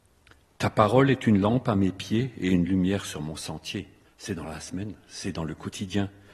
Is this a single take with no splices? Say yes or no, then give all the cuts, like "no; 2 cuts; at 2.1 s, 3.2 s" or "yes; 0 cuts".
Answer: no; 1 cut; at 4.1 s